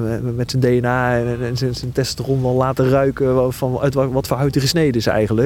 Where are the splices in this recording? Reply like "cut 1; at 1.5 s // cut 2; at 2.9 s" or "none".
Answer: cut 1; at 1.8 s